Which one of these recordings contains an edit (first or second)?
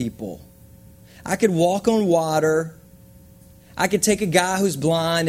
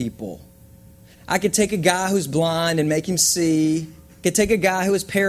second